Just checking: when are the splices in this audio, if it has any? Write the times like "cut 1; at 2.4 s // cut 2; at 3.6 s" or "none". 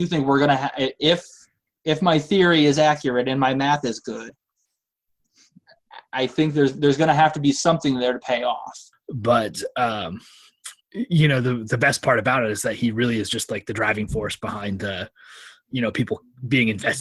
cut 1; at 8.9 s // cut 2; at 10.8 s